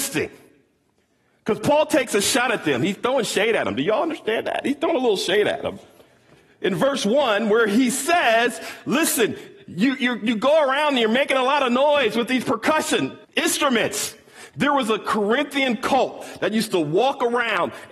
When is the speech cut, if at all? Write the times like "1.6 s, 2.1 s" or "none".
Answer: 13.2 s

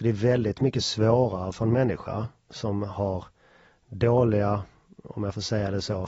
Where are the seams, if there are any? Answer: none

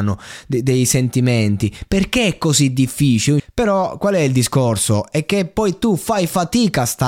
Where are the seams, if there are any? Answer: 3.4 s

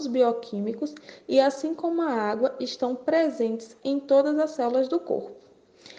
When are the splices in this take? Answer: none

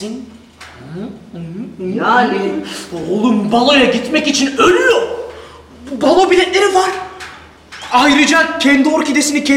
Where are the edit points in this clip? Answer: none

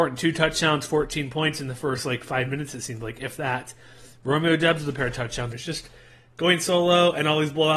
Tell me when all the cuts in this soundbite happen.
5.5 s

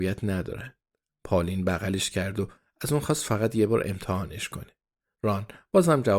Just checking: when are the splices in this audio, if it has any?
1.1 s

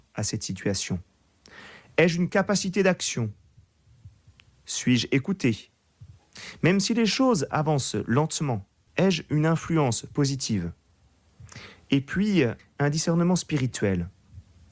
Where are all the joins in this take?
8.9 s, 12.6 s

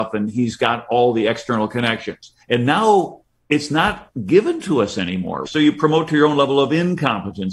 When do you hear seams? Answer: 2.4 s, 5.4 s

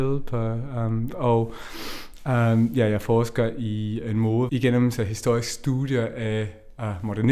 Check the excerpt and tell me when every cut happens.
1.1 s, 4.5 s

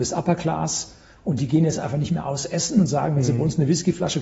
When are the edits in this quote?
none

